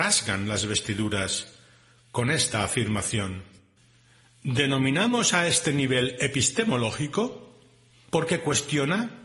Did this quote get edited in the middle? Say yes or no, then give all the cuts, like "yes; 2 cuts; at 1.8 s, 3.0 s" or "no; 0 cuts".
no; 0 cuts